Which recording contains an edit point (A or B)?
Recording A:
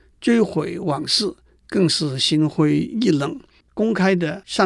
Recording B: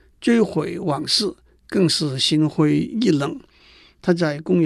A